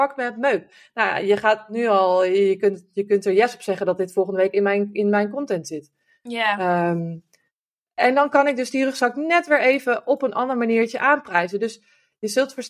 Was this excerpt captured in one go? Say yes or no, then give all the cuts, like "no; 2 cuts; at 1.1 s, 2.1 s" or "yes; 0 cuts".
yes; 0 cuts